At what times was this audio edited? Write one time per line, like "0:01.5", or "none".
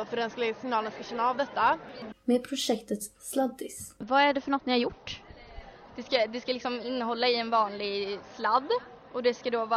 0:02.1
0:05.9